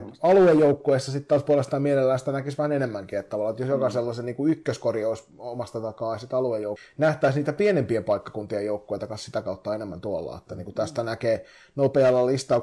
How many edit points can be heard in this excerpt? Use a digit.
0